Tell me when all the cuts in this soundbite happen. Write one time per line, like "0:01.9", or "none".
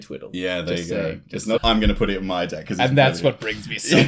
0:01.6